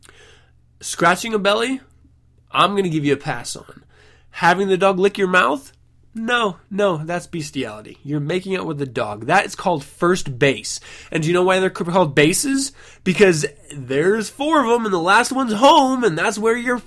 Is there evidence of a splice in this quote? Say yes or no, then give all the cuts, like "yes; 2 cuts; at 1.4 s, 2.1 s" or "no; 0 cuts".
no; 0 cuts